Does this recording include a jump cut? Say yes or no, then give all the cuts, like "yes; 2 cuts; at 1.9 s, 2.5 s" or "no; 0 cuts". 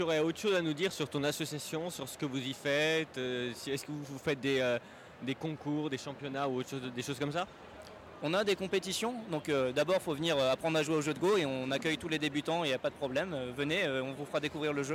no; 0 cuts